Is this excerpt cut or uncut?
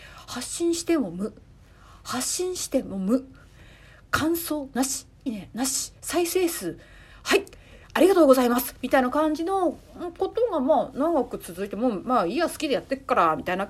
cut